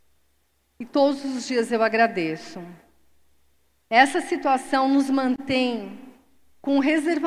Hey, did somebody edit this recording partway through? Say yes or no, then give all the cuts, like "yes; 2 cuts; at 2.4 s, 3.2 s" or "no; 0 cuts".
no; 0 cuts